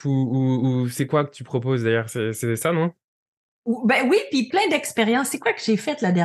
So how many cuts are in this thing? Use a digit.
1